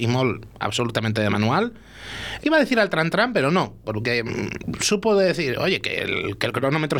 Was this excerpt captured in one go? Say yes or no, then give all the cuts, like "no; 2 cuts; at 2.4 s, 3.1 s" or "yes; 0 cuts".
no; 1 cut; at 2.4 s